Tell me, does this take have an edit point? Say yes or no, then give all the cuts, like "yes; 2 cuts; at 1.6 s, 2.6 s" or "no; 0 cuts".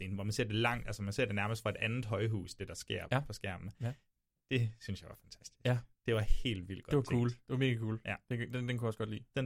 no; 0 cuts